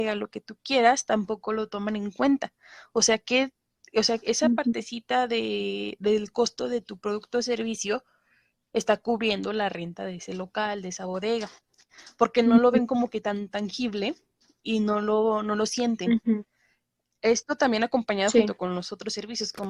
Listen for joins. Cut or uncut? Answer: uncut